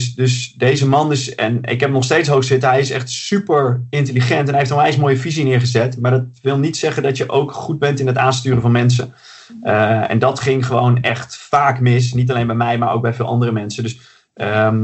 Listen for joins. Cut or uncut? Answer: uncut